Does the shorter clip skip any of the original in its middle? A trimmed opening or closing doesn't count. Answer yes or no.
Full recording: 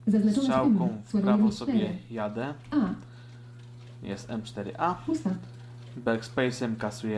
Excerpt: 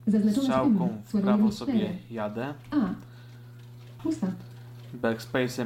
yes